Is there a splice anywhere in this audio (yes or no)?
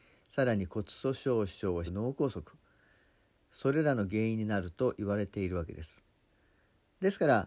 yes